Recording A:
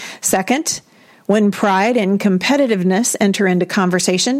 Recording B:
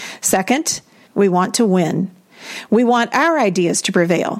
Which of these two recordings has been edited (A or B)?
B